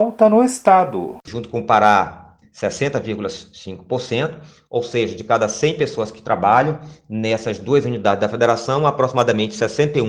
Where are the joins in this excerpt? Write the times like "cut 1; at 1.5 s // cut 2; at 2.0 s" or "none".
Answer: cut 1; at 2.4 s